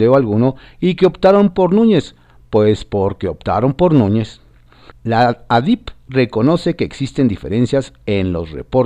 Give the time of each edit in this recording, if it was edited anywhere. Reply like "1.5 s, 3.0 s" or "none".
4.9 s